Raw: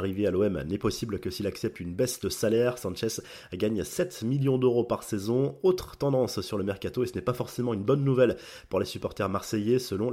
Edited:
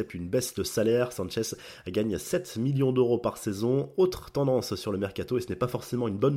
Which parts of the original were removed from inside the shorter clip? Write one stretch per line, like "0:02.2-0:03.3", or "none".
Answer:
none